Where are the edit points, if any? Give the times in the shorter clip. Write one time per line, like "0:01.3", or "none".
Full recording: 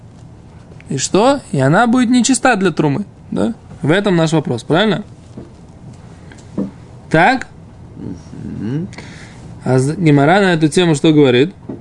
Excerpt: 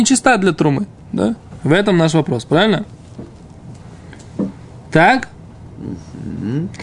none